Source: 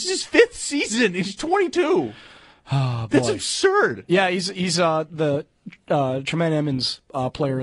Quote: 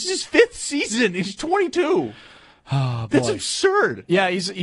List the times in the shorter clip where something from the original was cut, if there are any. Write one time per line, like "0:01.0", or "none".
none